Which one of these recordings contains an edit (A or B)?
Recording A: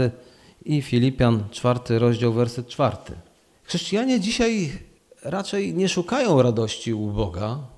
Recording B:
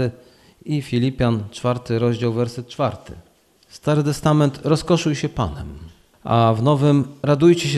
A